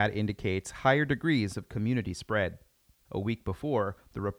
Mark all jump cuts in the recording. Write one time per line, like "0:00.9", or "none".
0:03.0